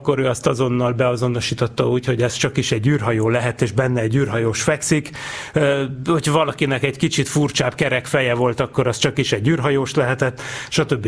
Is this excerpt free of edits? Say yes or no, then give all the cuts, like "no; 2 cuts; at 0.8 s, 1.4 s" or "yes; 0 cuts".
yes; 0 cuts